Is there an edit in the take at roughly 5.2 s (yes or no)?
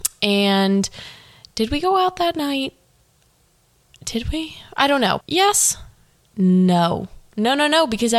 yes